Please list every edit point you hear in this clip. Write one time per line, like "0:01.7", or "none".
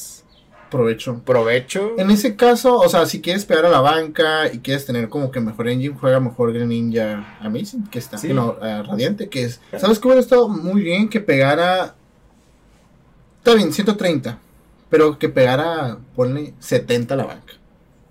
0:09.7